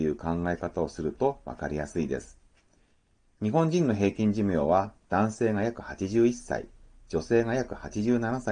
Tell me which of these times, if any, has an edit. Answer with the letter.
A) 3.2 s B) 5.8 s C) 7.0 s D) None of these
D